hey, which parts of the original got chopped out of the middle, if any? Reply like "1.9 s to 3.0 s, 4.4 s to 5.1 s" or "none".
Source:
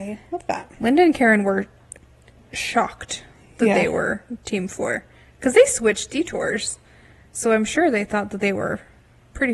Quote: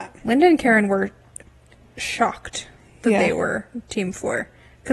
none